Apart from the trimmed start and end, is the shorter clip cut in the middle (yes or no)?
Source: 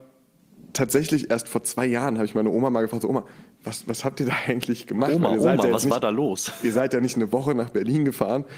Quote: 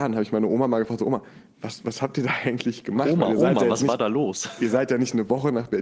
no